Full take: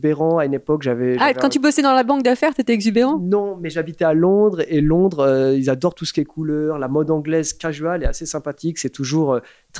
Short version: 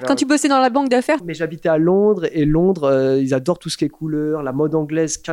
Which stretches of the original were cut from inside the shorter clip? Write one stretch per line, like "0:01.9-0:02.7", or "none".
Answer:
0:02.5-0:03.6

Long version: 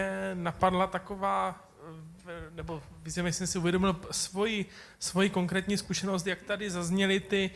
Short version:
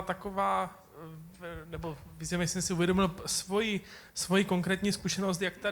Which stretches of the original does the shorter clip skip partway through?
none

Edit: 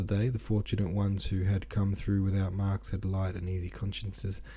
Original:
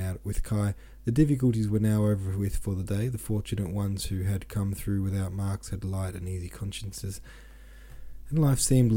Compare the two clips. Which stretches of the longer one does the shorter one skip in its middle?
none

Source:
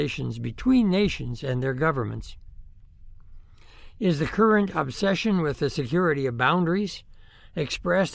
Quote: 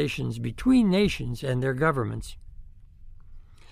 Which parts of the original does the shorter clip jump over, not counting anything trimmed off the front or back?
none

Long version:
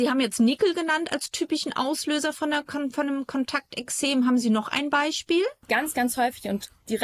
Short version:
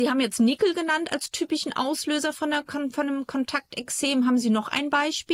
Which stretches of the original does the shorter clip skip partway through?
none

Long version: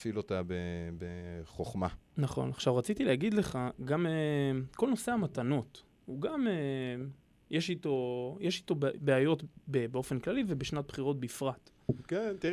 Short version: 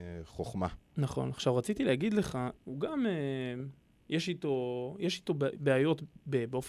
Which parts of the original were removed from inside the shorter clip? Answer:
0:03.8-0:06.0

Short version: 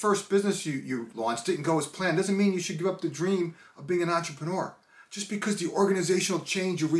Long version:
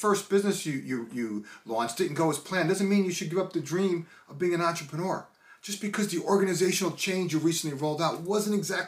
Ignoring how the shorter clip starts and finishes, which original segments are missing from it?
0:01.1-0:01.6

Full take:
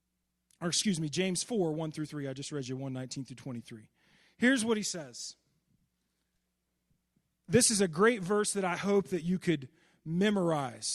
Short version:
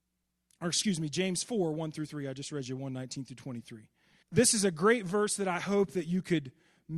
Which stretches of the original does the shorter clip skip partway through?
0:04.2-0:07.4

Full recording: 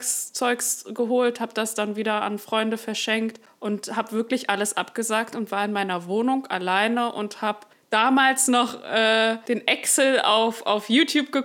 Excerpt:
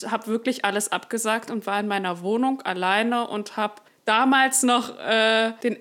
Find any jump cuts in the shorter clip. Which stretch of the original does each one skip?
none

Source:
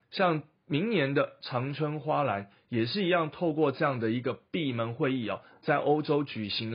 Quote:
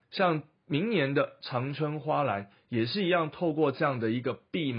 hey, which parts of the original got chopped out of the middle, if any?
none

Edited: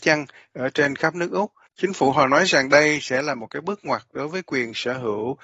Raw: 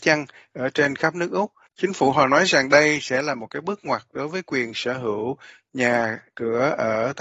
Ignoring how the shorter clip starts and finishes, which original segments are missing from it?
none

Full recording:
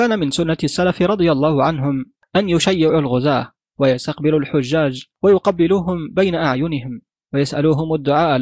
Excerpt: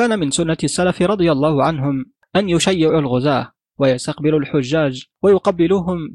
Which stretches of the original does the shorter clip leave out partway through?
none

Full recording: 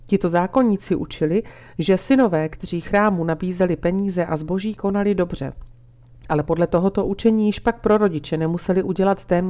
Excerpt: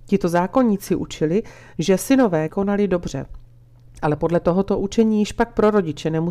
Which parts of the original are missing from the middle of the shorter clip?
0:02.5-0:04.8

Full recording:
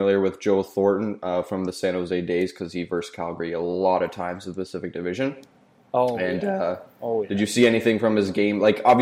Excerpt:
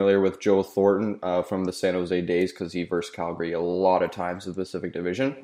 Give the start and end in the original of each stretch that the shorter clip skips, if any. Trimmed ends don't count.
none

